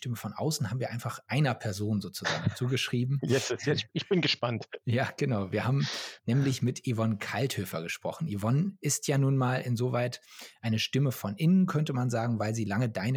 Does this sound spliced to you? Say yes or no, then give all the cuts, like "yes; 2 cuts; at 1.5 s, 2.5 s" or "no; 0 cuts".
no; 0 cuts